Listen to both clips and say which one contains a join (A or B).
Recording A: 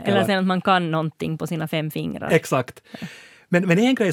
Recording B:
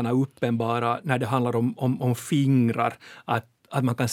B